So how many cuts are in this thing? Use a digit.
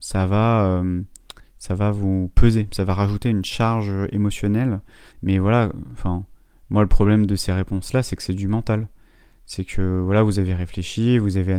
1